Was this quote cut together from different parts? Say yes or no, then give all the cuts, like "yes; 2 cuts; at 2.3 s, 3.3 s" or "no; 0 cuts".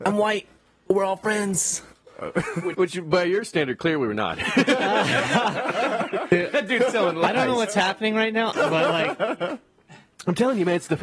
yes; 2 cuts; at 2.7 s, 8.5 s